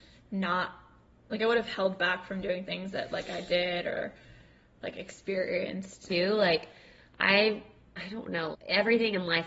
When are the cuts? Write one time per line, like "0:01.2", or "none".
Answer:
0:06.1
0:08.5